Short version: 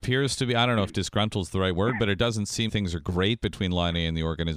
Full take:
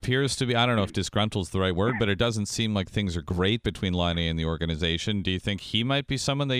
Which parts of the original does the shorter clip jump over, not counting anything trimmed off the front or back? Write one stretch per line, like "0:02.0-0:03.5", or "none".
0:02.7-0:02.9